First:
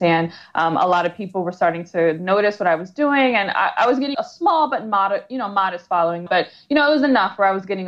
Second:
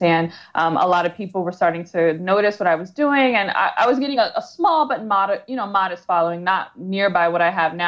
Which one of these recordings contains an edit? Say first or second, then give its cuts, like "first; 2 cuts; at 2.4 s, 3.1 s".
first; 2 cuts; at 4.1 s, 6.3 s